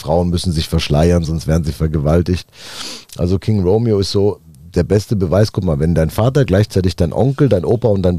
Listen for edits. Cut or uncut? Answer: uncut